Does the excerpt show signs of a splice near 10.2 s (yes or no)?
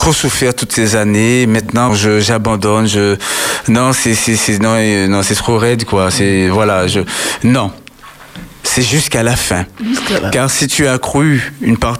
no